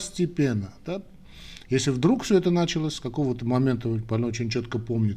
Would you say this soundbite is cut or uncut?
uncut